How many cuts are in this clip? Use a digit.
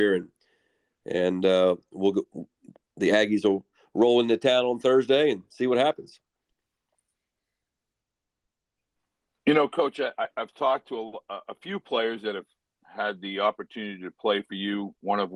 0